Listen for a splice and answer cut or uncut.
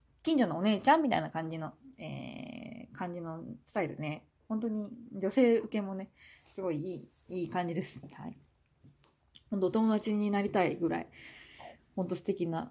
uncut